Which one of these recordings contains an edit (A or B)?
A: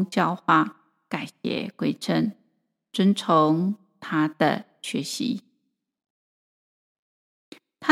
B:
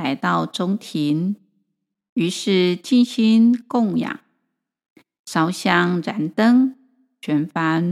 A